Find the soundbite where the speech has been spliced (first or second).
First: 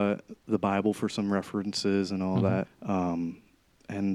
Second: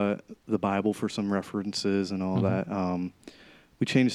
first